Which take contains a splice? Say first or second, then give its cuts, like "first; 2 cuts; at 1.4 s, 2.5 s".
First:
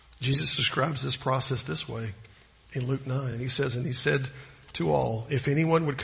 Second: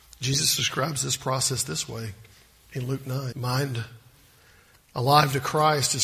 second; 1 cut; at 3.3 s